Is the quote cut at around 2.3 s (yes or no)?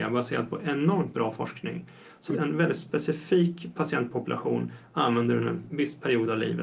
yes